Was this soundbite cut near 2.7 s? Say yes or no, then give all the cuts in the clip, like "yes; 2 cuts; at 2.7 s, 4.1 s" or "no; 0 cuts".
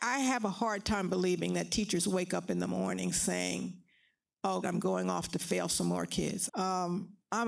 no; 2 cuts; at 4.6 s, 6.5 s